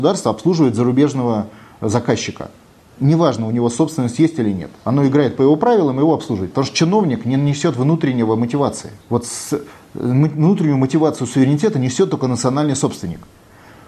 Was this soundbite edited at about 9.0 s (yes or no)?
yes